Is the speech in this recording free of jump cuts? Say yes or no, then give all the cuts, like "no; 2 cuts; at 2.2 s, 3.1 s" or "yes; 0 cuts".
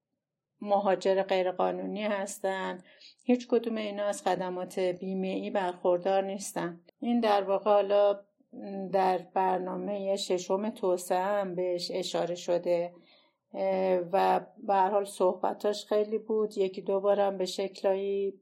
no; 1 cut; at 6.9 s